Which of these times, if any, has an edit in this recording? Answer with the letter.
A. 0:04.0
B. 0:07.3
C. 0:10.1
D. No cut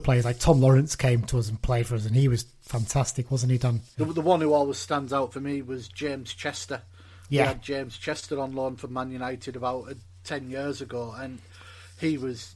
A